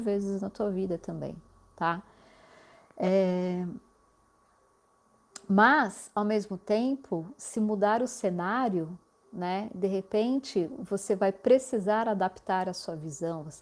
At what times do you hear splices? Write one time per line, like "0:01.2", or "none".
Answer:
none